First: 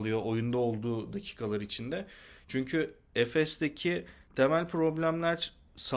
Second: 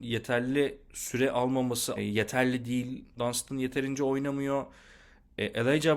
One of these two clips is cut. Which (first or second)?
second